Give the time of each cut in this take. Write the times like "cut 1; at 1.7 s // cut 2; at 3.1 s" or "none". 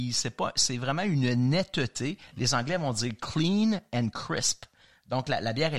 none